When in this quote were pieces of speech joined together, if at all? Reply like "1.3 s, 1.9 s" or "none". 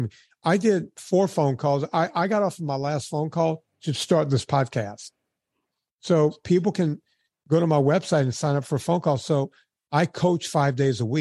none